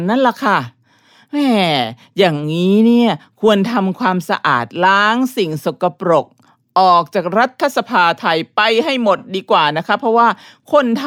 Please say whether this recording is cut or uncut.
uncut